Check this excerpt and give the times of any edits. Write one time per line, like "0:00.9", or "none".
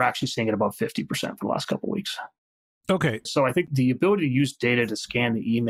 0:03.3

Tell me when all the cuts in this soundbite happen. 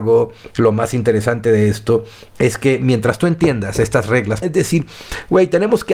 0:04.4

